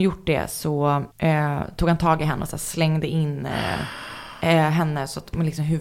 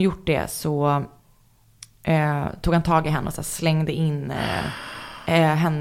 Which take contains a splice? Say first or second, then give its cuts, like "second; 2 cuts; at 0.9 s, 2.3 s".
first; 1 cut; at 1.1 s